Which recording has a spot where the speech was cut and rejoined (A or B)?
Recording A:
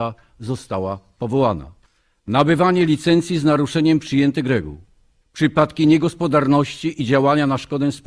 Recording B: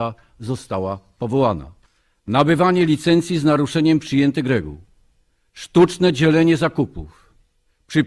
A